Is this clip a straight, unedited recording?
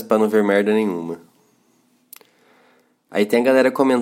yes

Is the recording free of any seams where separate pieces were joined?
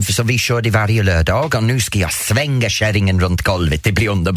yes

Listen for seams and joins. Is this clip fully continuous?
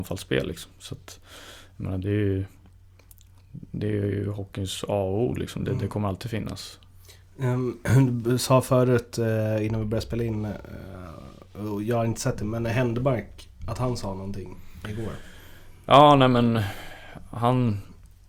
yes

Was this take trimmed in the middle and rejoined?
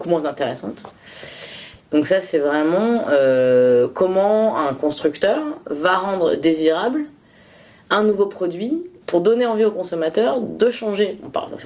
yes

